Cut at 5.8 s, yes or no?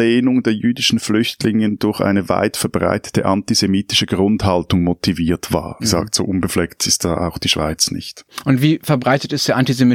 yes